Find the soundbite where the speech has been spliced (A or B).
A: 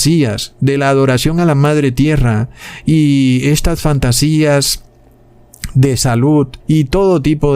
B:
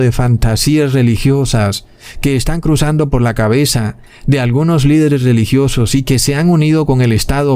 A